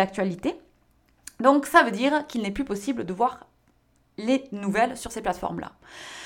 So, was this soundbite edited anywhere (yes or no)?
no